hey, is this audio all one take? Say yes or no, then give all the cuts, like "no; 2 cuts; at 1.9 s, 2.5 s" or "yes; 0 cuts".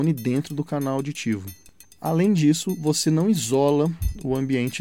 no; 1 cut; at 1.8 s